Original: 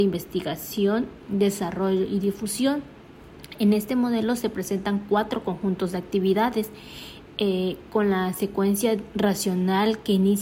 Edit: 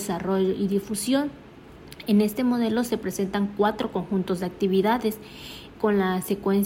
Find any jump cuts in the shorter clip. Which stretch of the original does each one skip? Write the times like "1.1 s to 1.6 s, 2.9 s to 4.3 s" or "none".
7.3 s to 7.9 s

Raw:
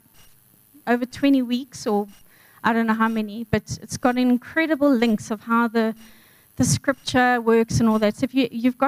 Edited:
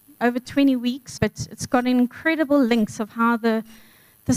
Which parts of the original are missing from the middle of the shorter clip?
1.8 s to 3.5 s

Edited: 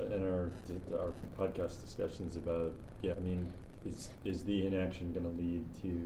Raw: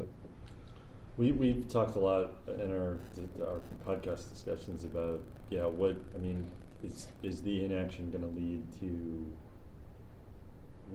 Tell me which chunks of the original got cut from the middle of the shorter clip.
5.6 s to 6.1 s

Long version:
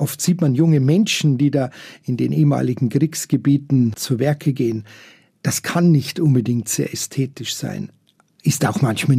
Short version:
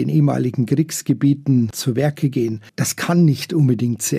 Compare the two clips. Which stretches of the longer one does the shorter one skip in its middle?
4.9 s to 5.4 s

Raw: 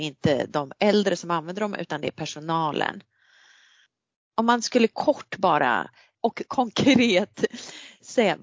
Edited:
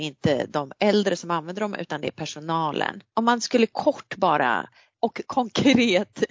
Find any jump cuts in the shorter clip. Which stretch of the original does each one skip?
3.1 s to 4.3 s

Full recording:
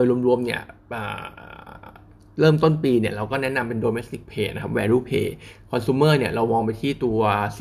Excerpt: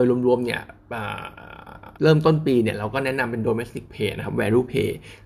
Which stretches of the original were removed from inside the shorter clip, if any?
1.9 s to 2.3 s

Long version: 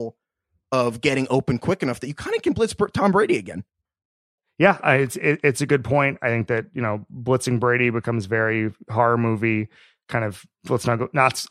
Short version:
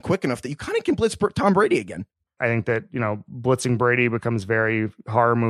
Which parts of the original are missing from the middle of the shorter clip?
4.0 s to 6.2 s

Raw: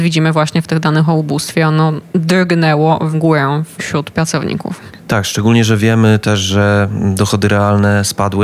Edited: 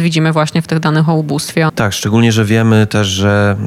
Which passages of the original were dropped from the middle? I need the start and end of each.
1.7 s to 5.0 s

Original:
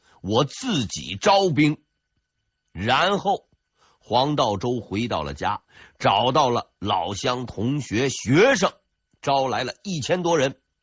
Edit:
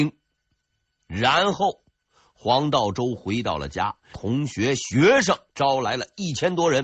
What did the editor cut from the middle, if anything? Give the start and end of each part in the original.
5.8 s to 7.5 s, 8.8 s to 9.2 s

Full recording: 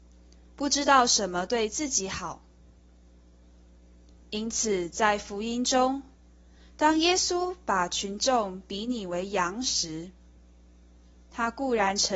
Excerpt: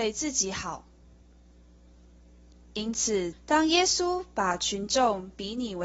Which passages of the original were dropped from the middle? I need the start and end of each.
4.9 s to 6.6 s

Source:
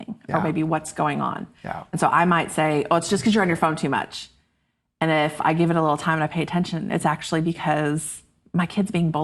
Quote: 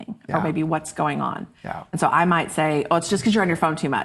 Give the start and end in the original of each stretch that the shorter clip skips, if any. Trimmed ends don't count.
none

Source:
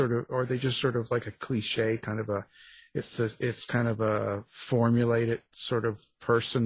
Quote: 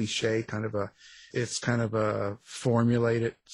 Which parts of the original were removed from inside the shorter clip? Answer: 2.8 s to 3.4 s

